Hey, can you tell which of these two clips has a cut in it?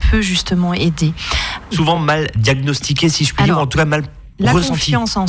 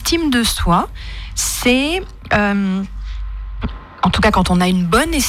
first; 1 cut; at 1.7 s

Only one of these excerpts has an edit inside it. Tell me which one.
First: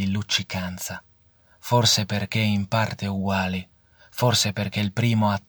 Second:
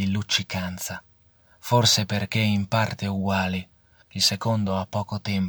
second; 1 cut; at 4.0 s

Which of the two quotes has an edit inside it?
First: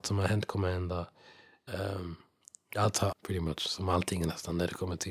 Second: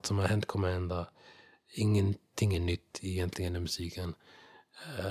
first; 2 cuts; at 1.7 s, 3.1 s

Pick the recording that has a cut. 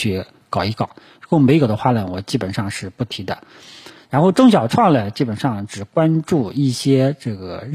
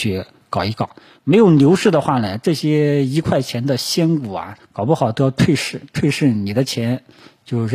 second; 2 cuts; at 1.2 s, 4.6 s

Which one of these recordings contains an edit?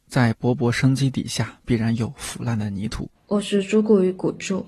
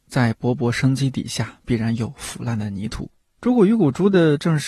first; 1 cut; at 3.2 s

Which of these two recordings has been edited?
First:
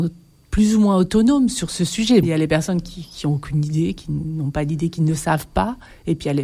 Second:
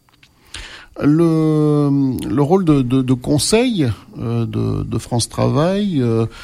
first; 1 cut; at 2.2 s

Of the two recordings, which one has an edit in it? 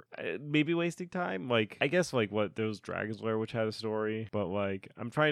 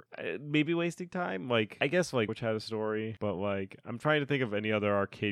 second; 1 cut; at 2.3 s

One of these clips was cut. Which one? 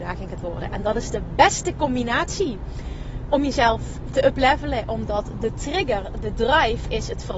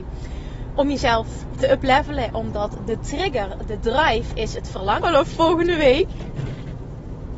second; 1 cut; at 5.0 s

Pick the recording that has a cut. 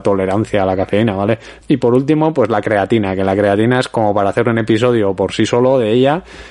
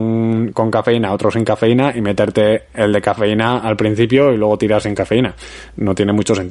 first; 1 cut; at 1.6 s

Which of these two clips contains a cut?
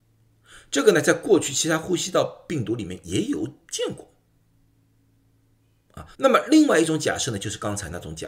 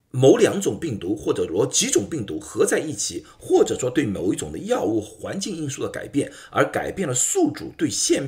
first; 1 cut; at 6.1 s

